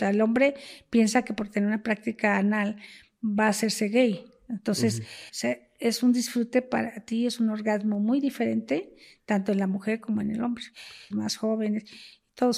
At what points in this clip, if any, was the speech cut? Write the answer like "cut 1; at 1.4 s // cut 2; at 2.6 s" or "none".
cut 1; at 5.3 s // cut 2; at 11.1 s